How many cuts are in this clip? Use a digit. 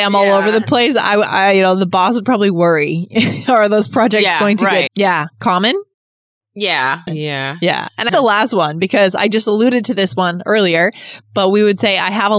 3